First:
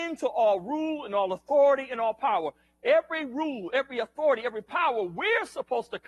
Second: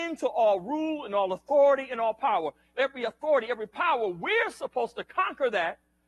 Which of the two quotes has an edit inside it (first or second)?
second